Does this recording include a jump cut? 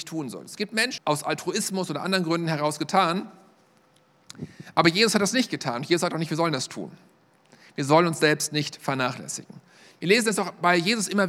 yes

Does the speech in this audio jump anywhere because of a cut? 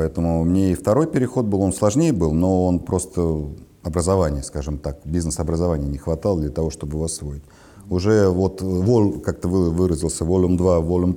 no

